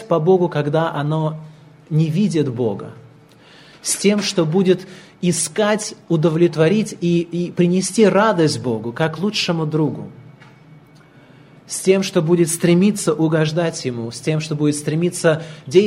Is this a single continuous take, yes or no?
yes